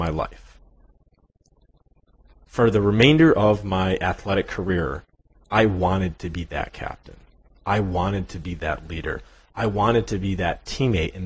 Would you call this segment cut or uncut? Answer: uncut